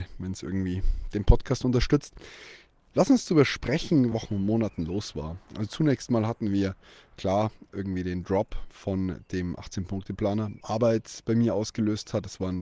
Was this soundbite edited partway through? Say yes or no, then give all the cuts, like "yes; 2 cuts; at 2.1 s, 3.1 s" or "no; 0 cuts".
yes; 2 cuts; at 4.1 s, 10.6 s